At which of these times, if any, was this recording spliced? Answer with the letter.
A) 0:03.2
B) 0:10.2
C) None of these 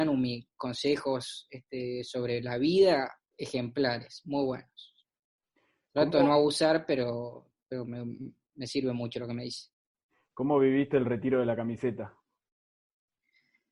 A